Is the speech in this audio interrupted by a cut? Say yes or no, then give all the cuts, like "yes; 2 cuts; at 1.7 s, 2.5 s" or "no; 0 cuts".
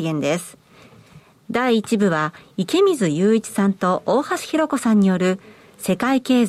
no; 0 cuts